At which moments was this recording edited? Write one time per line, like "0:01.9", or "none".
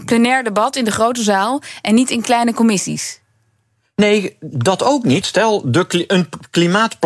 0:05.2